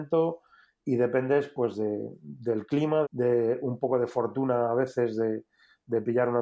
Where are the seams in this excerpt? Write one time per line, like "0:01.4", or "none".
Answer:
0:03.0